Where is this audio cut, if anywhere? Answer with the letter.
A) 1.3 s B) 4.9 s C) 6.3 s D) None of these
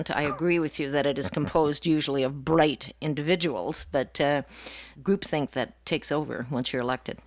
B